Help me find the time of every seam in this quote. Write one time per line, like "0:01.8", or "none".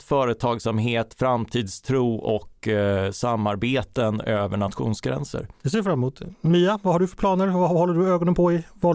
none